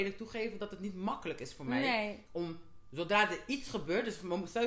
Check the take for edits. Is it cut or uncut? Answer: uncut